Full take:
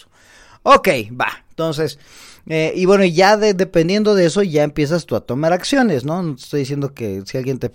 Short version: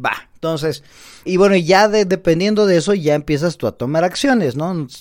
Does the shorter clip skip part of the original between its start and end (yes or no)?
yes